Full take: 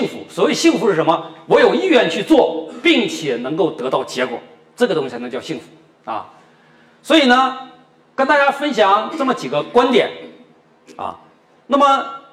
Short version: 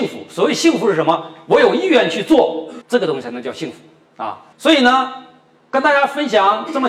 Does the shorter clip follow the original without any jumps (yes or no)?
no